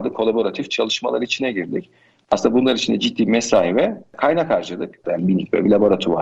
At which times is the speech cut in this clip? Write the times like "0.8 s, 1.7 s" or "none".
5.0 s